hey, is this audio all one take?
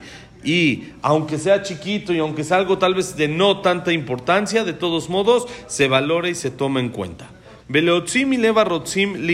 no; 1 cut; at 7.6 s

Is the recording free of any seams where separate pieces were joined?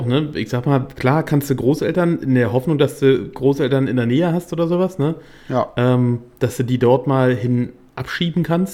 yes; 0 cuts

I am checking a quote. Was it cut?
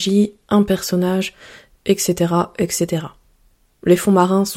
yes; 1 cut; at 3.7 s

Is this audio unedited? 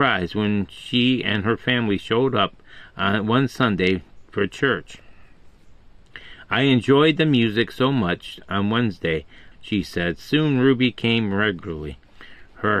no; 1 cut; at 9.5 s

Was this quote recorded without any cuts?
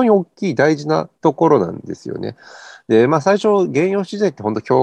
yes; 0 cuts

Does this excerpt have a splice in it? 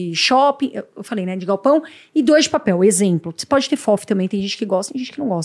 no; 0 cuts

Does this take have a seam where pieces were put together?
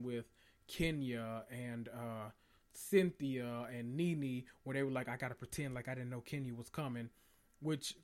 no; 0 cuts

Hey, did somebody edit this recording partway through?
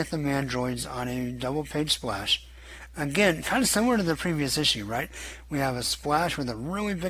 no; 0 cuts

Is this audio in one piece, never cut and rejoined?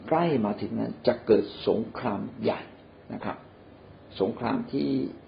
yes; 0 cuts

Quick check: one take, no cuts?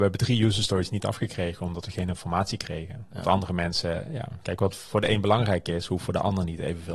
yes; 0 cuts

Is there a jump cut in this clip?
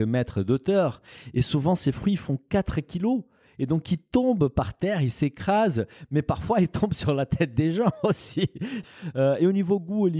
no; 0 cuts

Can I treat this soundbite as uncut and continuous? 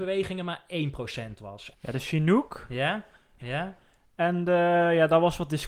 no; 2 cuts; at 1.7 s, 3.4 s

